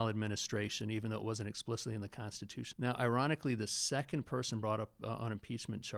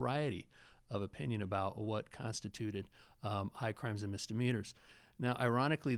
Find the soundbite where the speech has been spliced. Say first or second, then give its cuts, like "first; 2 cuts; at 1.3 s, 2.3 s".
first; 1 cut; at 2.7 s